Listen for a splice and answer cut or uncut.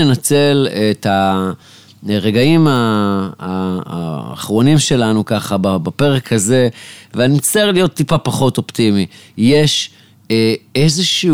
uncut